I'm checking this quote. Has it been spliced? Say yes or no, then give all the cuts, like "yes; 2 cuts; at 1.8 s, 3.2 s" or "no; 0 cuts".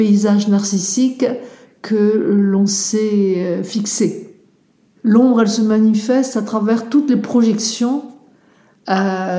yes; 1 cut; at 5.0 s